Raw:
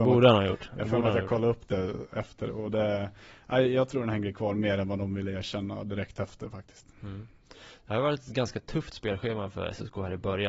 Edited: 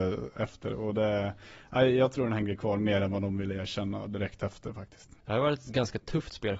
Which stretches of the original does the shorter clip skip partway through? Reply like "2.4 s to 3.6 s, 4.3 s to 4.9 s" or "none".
6.9 s to 7.8 s